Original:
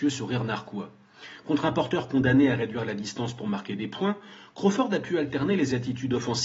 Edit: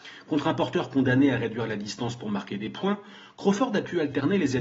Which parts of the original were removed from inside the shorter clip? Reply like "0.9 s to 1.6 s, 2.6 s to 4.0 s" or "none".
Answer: none